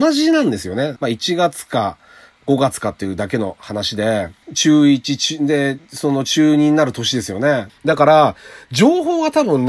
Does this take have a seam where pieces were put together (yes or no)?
yes